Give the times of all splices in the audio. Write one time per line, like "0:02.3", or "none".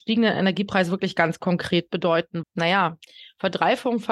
0:02.4